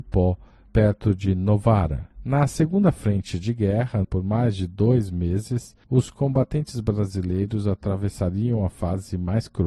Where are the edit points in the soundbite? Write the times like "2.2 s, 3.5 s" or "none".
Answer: 4.0 s